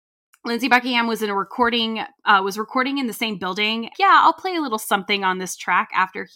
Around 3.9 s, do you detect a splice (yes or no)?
yes